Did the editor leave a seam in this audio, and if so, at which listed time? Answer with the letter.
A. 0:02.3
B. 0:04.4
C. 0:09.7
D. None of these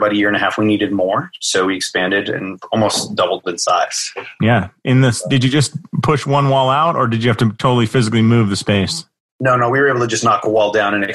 D